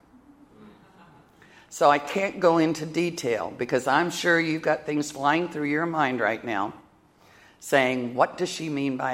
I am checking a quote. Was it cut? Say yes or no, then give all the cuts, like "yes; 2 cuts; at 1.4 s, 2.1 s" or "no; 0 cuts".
no; 0 cuts